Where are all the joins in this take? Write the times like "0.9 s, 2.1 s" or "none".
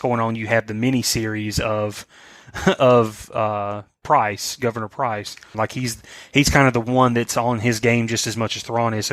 5.5 s